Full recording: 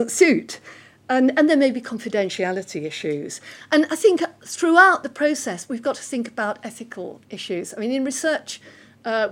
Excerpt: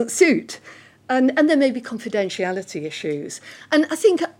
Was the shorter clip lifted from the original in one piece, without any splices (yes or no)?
yes